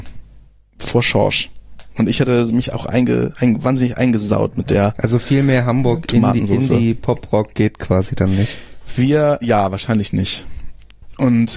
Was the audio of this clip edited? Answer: yes; 1 cut; at 9.4 s

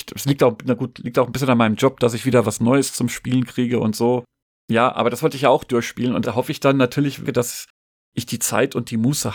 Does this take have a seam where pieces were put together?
yes; 2 cuts; at 6.2 s, 7.2 s

